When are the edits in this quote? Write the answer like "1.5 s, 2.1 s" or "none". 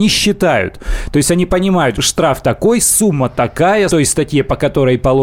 1.9 s, 3.9 s